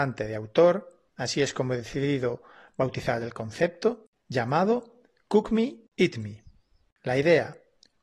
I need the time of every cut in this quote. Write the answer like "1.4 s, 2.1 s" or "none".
1.1 s